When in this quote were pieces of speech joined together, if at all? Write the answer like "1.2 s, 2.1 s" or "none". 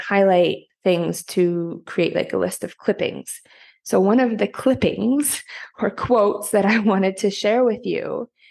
none